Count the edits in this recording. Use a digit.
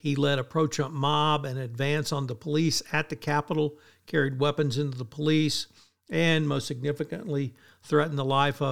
0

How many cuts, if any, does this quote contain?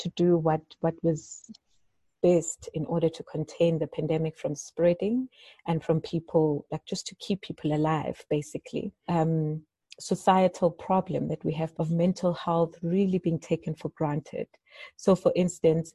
2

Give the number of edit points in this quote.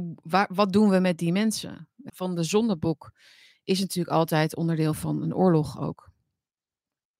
1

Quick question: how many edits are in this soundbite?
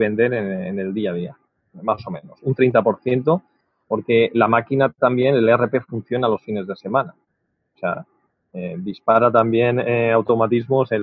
0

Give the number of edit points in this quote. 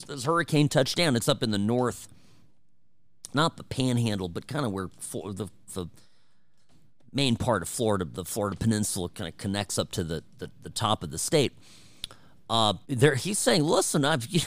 2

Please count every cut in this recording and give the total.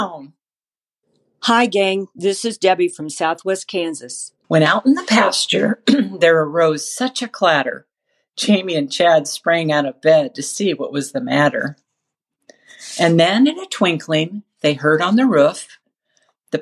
1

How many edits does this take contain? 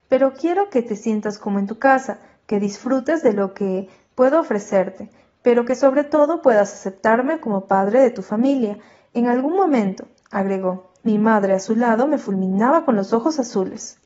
1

